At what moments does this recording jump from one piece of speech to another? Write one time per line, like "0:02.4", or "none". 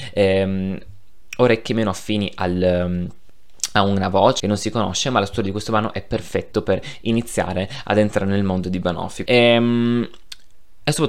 0:04.4
0:09.3